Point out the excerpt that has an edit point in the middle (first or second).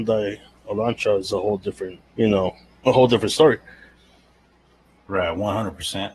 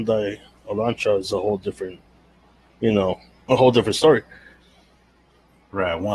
first